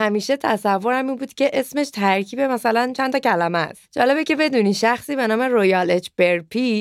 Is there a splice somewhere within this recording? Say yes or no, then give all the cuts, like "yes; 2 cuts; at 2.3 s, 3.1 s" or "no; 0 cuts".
no; 0 cuts